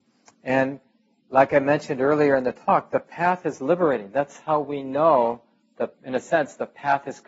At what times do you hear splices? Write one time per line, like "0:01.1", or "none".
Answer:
none